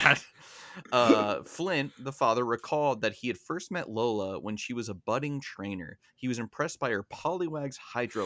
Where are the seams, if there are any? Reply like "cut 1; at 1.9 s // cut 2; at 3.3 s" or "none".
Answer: none